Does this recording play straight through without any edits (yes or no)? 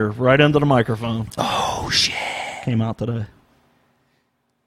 no